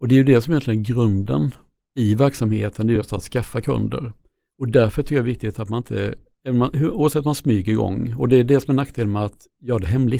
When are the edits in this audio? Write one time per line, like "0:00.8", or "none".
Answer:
none